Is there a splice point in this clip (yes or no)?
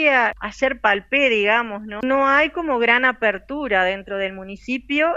yes